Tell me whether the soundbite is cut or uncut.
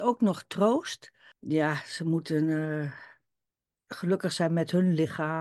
cut